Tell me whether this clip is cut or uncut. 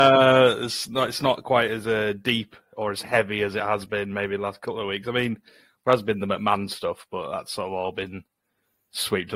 uncut